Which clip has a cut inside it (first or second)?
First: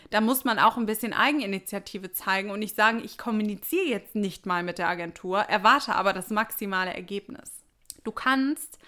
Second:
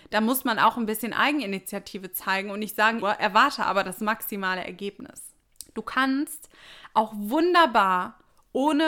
second